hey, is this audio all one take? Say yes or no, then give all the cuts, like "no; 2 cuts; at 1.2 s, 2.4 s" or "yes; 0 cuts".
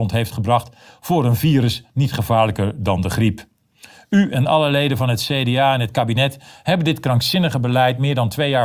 yes; 0 cuts